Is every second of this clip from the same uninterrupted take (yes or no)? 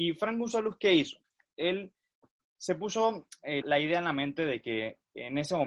no